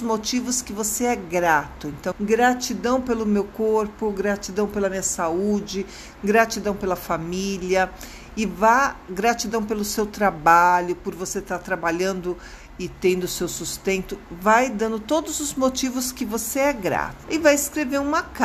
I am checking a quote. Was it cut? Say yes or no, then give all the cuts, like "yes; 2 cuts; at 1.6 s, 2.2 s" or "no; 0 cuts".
yes; 2 cuts; at 2.1 s, 17.2 s